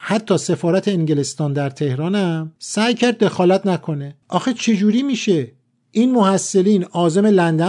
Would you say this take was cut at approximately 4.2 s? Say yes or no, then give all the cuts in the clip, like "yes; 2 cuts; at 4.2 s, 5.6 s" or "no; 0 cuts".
yes; 2 cuts; at 2.6 s, 4.2 s